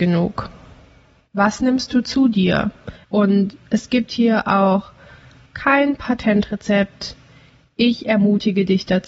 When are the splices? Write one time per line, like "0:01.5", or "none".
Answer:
0:03.0